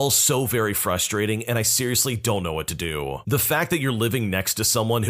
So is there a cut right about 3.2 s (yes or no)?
yes